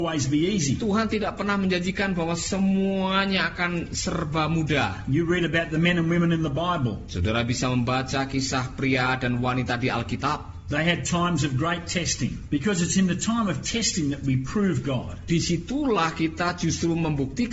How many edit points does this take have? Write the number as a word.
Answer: one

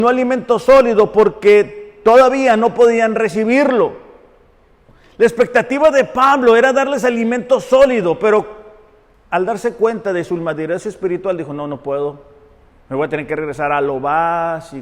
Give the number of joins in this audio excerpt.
zero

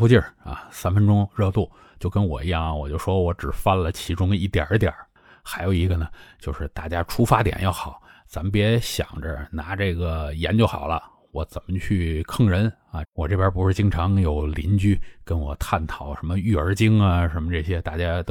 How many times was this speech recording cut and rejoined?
one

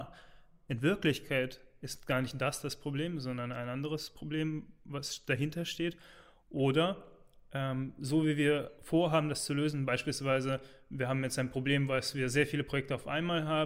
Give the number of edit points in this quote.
zero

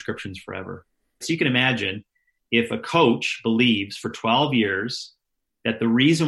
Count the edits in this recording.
one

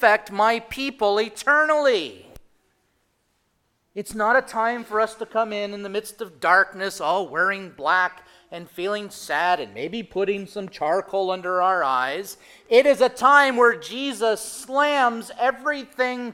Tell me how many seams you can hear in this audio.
zero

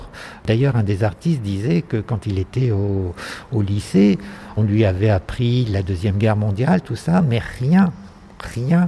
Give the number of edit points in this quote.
one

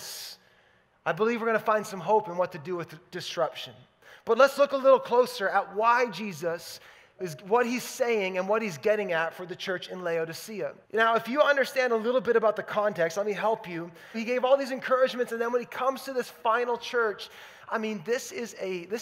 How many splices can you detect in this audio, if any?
two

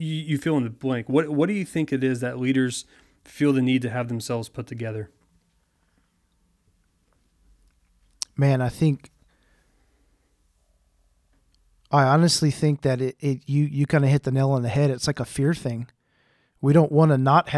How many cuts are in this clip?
zero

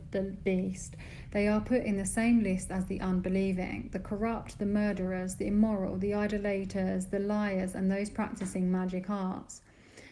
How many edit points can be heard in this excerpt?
one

